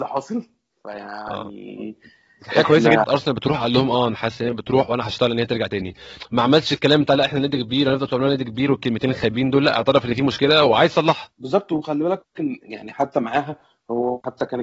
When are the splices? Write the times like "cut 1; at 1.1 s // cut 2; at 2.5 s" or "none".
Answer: cut 1; at 3.0 s // cut 2; at 11.3 s

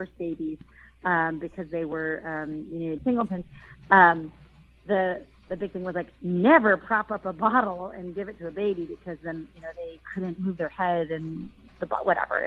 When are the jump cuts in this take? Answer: cut 1; at 3.0 s

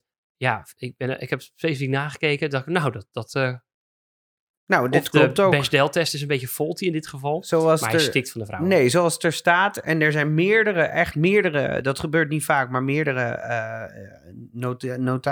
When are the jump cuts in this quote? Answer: none

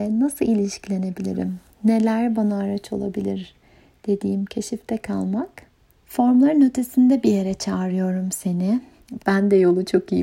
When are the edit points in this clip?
cut 1; at 6.0 s // cut 2; at 9.2 s

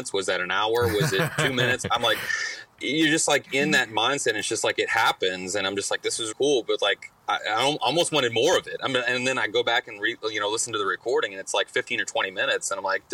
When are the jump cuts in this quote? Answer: cut 1; at 6.3 s

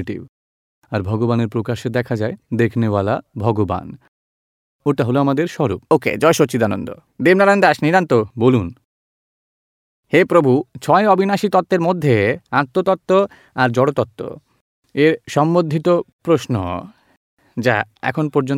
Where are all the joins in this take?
cut 1; at 5.9 s // cut 2; at 12.5 s

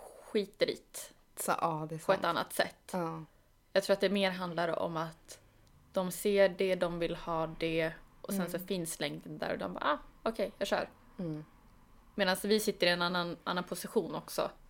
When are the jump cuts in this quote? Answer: none

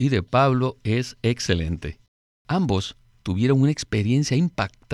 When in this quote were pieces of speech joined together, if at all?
none

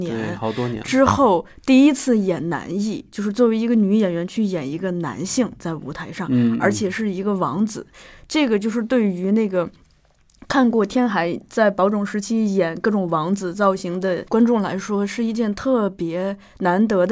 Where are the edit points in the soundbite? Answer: none

